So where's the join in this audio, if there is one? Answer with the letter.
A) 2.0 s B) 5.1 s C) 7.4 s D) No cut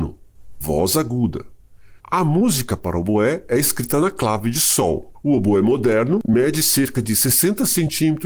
B